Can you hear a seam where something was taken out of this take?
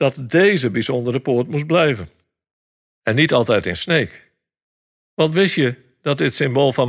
yes; 1 cut; at 2.9 s

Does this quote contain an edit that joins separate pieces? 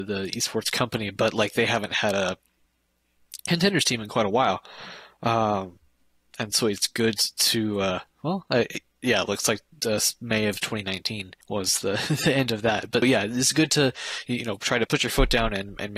yes; 3 cuts; at 11.4 s, 13.0 s, 14.9 s

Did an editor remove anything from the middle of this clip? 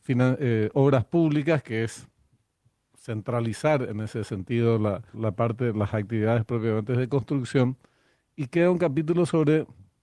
yes; 1 cut; at 5.1 s

